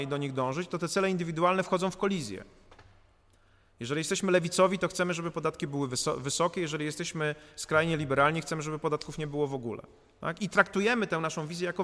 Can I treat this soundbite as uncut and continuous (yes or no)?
yes